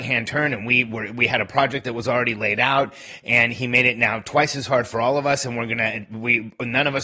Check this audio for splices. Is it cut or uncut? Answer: uncut